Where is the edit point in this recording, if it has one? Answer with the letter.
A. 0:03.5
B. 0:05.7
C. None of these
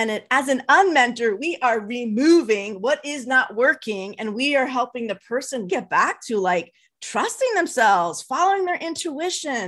B